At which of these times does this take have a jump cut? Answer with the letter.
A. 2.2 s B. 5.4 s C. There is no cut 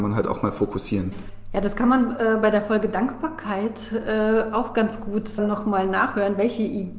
B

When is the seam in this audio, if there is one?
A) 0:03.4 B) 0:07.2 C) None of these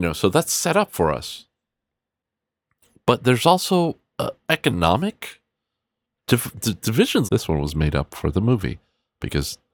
B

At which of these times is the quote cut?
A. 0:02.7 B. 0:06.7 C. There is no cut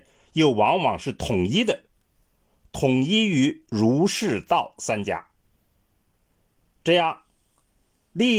C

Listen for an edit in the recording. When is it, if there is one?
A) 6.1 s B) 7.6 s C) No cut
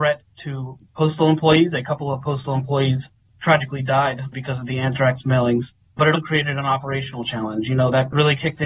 A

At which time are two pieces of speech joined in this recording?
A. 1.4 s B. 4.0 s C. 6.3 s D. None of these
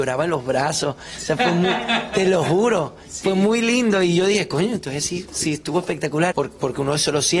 C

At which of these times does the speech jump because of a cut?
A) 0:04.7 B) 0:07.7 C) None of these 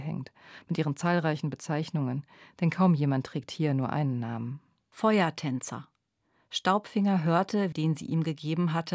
B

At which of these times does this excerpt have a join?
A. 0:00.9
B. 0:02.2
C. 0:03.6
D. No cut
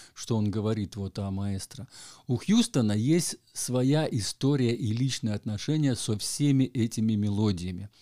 D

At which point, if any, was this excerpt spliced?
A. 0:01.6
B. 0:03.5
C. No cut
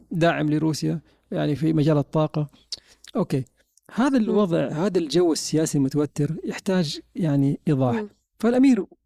A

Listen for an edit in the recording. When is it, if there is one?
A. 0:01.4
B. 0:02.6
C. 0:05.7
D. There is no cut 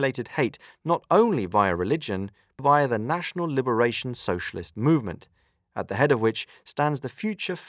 B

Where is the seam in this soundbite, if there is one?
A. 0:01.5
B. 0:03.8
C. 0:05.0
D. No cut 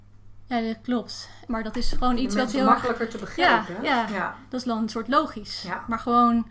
A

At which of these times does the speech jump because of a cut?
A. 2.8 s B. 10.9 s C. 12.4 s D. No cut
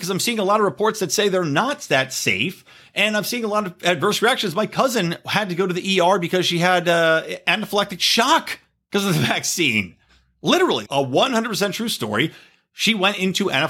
B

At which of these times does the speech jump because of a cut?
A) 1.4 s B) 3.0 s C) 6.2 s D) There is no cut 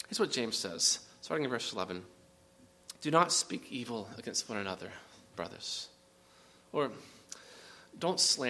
B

